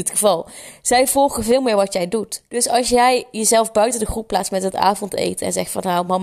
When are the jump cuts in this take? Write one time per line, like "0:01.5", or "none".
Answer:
0:02.5